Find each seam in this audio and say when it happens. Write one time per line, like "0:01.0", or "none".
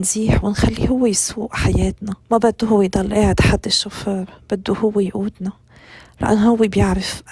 0:02.2